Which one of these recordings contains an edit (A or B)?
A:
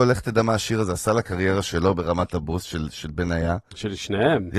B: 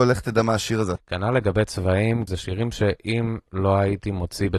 B